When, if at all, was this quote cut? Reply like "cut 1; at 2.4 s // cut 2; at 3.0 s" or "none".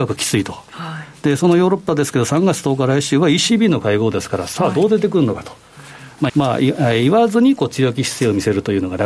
cut 1; at 6.3 s